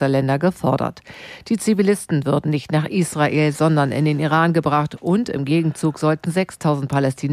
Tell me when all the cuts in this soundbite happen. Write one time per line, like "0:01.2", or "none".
none